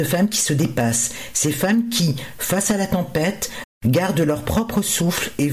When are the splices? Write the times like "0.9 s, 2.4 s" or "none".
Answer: 3.6 s